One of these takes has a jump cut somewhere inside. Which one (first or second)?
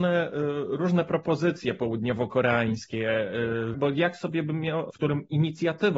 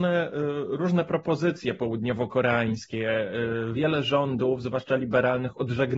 first